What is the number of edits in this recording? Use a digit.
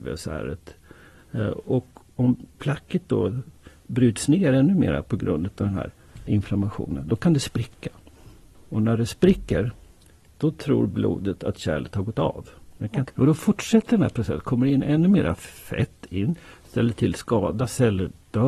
2